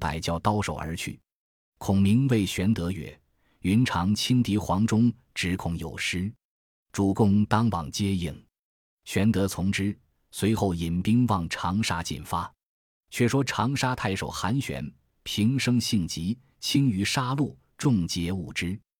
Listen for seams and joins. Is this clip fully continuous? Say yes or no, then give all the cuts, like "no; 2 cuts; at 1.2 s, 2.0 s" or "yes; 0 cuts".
yes; 0 cuts